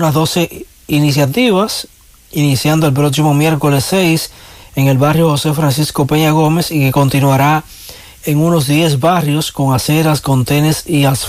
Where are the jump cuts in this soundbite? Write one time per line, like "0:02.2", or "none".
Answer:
none